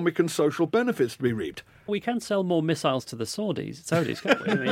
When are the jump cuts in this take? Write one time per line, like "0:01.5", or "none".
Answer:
0:01.9